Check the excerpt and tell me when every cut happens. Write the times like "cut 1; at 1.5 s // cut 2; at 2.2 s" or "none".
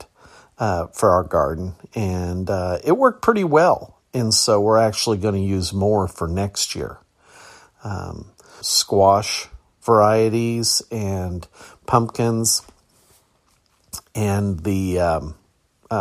cut 1; at 8.6 s